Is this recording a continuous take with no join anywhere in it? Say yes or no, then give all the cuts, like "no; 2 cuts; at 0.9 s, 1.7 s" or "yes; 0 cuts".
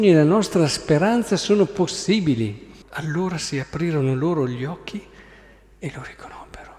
no; 1 cut; at 2.8 s